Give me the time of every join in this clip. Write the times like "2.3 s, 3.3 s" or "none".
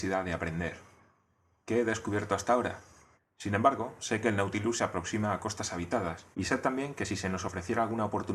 3.2 s, 6.3 s